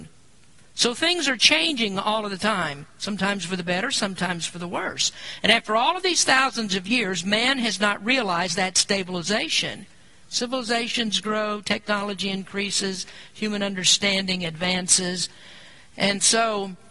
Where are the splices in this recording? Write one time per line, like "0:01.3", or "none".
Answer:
0:10.2